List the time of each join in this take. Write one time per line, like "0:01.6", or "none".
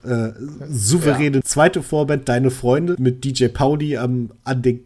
0:01.4
0:02.9